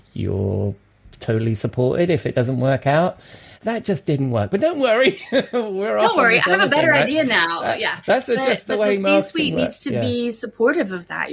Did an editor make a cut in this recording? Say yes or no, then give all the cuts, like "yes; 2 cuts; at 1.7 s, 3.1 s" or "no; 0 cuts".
yes; 1 cut; at 3.6 s